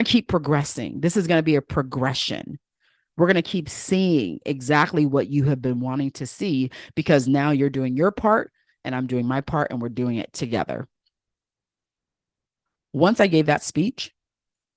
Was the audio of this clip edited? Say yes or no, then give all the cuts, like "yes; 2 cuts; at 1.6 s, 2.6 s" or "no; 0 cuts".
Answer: no; 0 cuts